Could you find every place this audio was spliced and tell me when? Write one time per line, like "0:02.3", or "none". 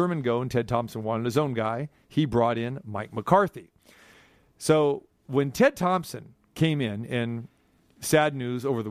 none

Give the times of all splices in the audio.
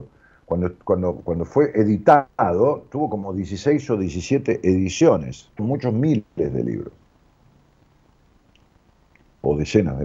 0:05.6

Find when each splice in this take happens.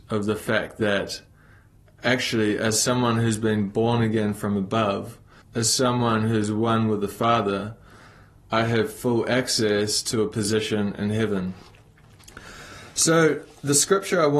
0:05.4

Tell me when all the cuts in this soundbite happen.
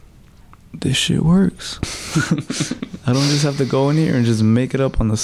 0:02.8

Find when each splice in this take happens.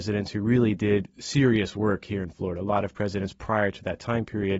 none

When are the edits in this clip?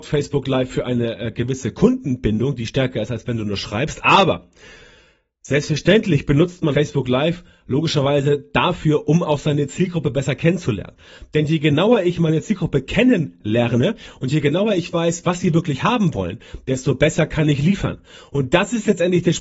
0:06.7

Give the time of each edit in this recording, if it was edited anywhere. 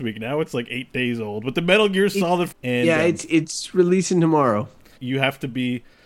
0:02.5
0:05.0

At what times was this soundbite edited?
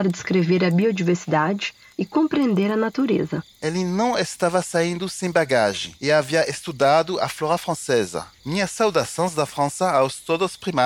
0:03.5
0:08.4

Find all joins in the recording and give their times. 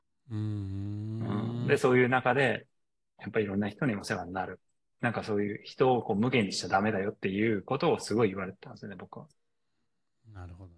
0:03.2
0:04.9

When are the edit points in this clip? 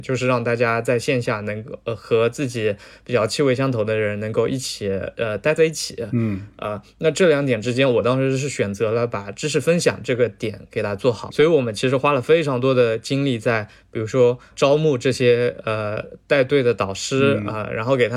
0:11.3
0:14.5

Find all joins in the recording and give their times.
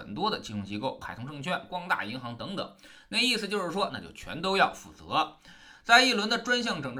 0:01.0
0:03.9

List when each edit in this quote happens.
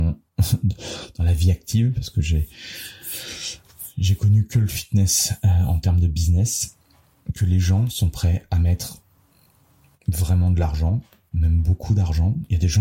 none

